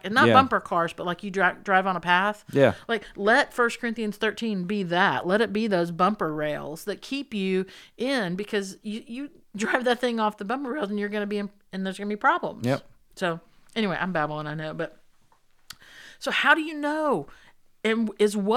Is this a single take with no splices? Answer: yes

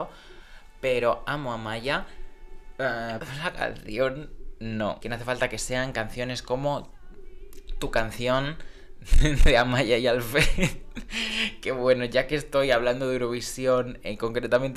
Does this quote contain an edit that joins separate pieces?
yes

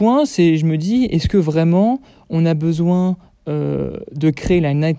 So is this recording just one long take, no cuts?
yes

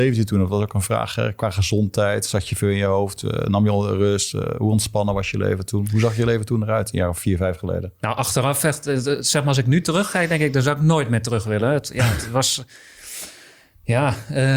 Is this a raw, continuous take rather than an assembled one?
yes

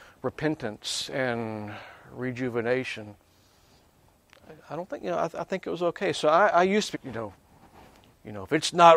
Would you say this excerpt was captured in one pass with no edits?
no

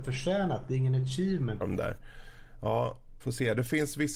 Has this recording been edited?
yes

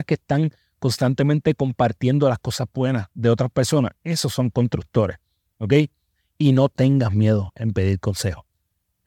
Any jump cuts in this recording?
no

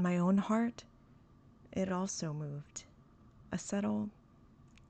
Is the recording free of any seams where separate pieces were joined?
yes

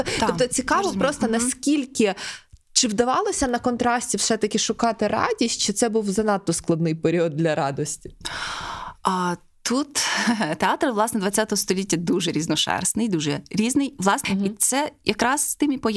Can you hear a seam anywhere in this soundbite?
yes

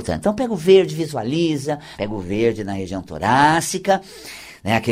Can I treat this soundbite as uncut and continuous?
no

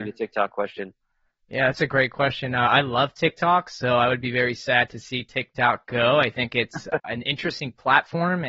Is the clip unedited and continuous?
yes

